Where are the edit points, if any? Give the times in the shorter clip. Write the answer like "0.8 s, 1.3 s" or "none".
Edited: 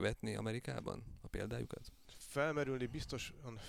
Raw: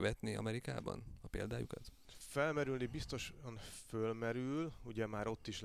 none